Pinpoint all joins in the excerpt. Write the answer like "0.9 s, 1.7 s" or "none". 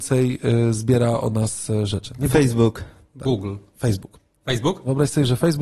none